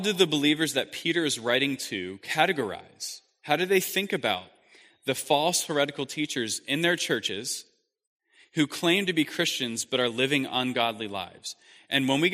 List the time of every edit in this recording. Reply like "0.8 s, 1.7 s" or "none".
none